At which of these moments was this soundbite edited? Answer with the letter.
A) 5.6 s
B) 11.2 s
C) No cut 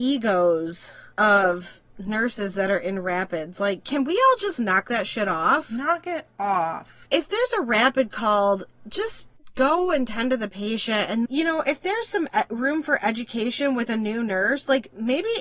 B